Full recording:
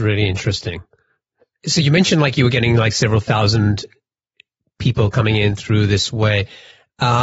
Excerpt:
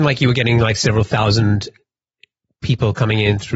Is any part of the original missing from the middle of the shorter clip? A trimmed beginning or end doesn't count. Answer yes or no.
no